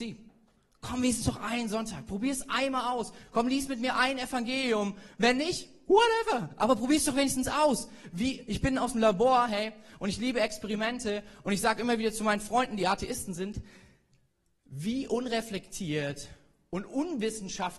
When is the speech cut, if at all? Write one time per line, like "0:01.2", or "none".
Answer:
none